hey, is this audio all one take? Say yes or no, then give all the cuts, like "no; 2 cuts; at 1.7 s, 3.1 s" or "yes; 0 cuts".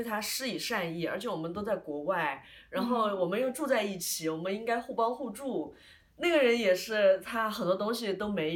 yes; 0 cuts